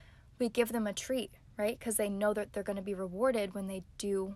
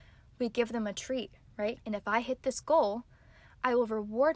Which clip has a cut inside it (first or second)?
second